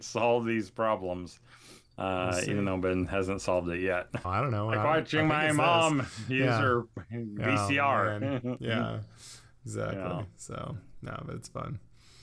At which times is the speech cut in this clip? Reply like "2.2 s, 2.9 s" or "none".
4.2 s